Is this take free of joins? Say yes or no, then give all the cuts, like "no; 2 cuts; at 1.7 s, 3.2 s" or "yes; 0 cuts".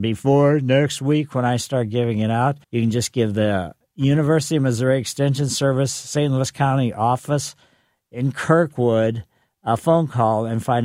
no; 1 cut; at 2.6 s